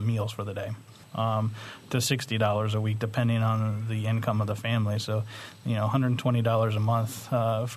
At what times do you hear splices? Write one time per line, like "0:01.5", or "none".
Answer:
0:01.0